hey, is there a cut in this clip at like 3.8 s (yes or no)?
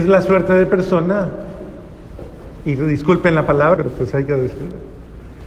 yes